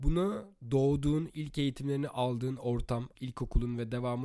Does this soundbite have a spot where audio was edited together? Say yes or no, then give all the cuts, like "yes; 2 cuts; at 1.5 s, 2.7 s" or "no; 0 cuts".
yes; 1 cut; at 3.1 s